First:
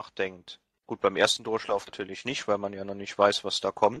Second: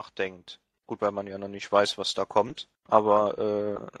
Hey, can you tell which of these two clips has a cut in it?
second; 1 cut; at 1.0 s

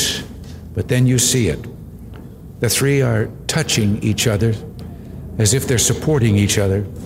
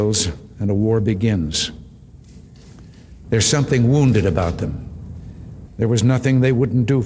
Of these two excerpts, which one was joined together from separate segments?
second; 2 cuts; at 3.2 s, 5.7 s

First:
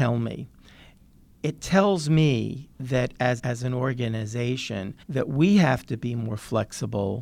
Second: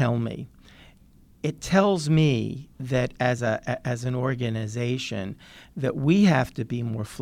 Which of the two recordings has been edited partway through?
first; 2 cuts; at 3.4 s, 5.0 s

